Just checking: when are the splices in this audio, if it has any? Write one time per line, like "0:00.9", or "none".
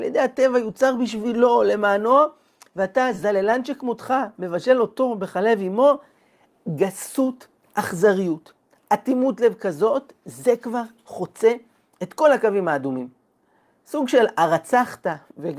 none